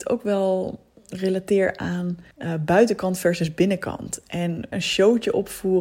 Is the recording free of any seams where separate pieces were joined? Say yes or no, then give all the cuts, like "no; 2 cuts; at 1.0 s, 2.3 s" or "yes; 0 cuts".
no; 2 cuts; at 2.3 s, 4.7 s